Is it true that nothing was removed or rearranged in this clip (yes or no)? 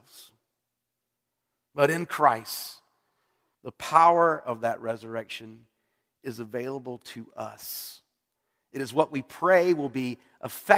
no